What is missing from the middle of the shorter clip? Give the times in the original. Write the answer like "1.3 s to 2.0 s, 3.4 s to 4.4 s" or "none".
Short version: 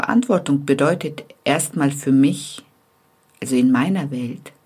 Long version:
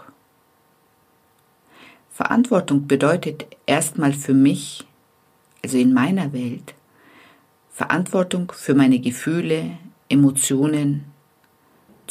none